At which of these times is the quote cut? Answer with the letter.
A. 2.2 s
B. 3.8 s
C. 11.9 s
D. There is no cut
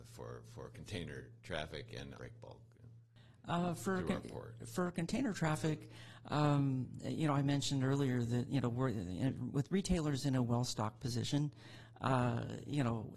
A